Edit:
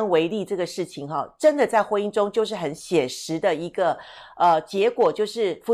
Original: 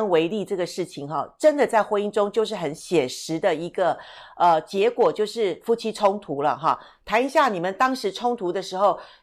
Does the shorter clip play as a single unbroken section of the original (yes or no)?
yes